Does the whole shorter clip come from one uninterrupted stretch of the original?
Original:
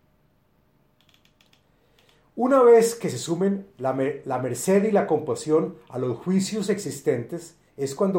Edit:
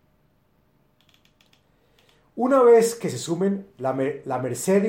yes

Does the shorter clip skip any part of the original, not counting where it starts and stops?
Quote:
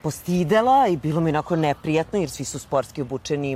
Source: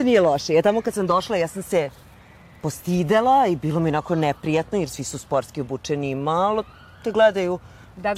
no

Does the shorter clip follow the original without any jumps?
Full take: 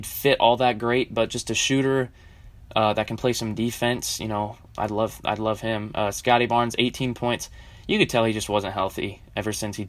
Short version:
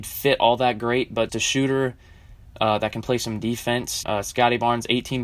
no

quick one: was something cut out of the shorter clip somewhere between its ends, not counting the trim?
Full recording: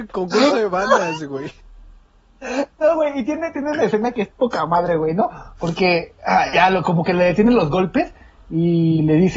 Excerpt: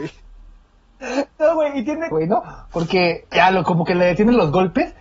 yes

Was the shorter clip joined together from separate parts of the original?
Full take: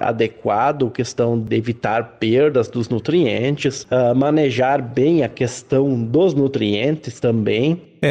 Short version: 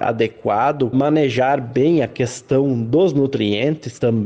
yes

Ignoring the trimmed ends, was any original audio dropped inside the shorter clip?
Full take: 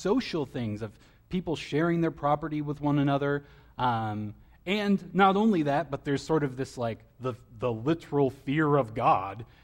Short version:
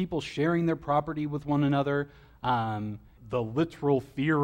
yes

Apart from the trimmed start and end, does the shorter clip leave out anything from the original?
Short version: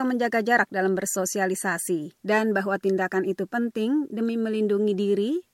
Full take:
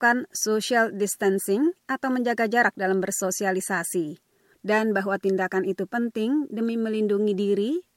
yes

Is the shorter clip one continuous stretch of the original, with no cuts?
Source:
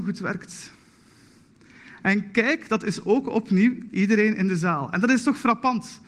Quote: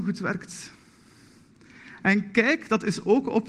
yes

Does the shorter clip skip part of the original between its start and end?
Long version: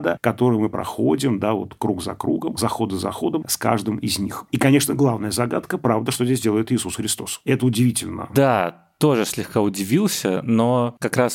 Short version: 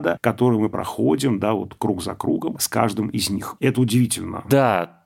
yes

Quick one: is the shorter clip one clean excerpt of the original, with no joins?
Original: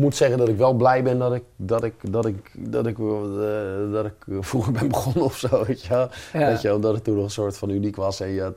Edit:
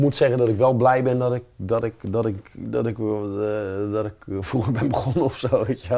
yes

